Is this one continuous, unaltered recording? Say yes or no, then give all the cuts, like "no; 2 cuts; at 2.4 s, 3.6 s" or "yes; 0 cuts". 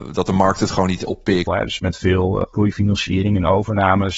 no; 1 cut; at 1.5 s